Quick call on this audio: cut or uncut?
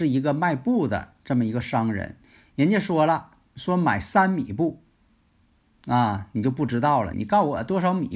cut